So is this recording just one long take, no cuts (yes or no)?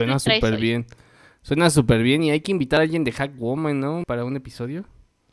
no